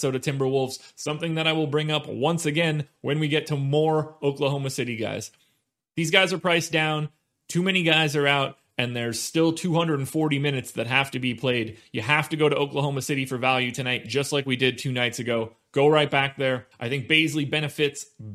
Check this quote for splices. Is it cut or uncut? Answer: cut